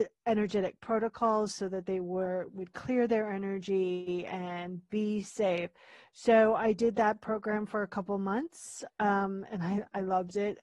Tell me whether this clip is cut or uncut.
uncut